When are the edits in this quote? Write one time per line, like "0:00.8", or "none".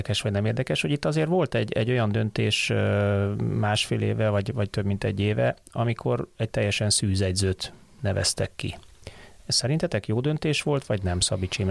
none